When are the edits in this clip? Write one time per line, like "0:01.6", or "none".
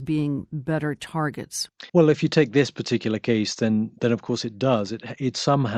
0:01.9